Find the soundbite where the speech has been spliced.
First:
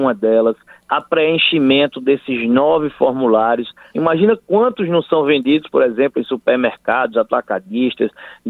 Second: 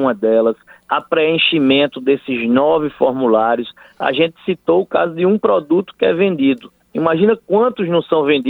first; 1 cut; at 3.9 s

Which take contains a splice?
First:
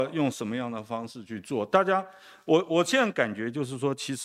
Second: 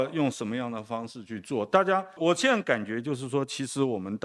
second; 1 cut; at 2.2 s

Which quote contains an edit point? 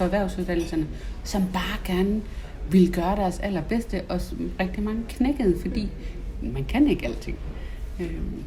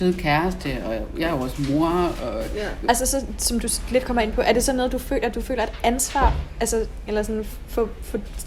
second; 2 cuts; at 2.9 s, 7.1 s

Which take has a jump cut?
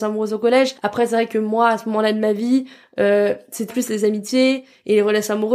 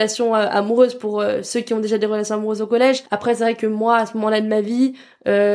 first; 1 cut; at 3.7 s

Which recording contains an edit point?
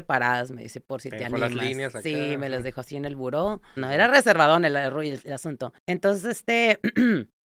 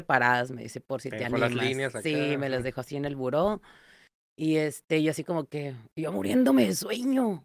first; 2 cuts; at 3.8 s, 5.8 s

